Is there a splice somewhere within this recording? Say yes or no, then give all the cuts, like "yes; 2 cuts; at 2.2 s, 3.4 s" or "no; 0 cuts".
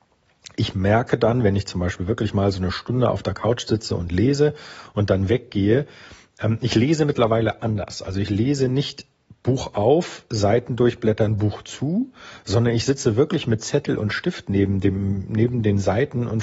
no; 0 cuts